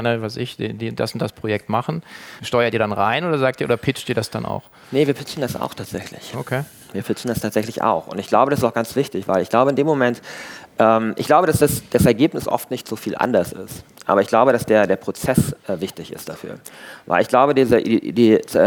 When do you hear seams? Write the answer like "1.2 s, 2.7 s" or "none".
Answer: 2.4 s